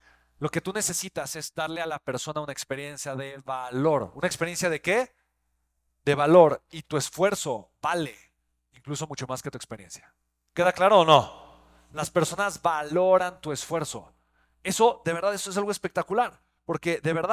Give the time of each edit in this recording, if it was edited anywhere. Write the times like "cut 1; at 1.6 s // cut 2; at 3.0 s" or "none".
none

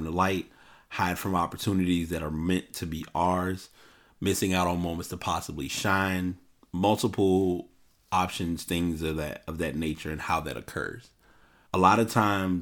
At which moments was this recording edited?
cut 1; at 11.7 s

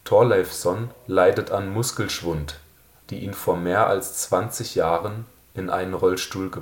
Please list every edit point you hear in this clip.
cut 1; at 3.0 s

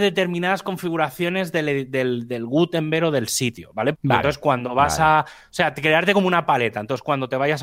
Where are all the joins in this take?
cut 1; at 3.9 s

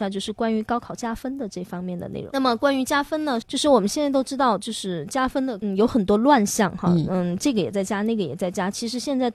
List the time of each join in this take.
cut 1; at 3.4 s

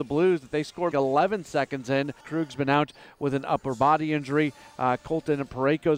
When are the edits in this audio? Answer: cut 1; at 0.9 s // cut 2; at 2.2 s

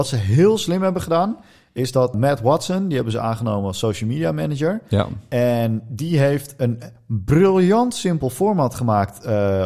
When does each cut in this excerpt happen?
cut 1; at 2.1 s

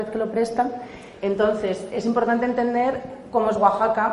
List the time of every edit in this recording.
cut 1; at 1.2 s

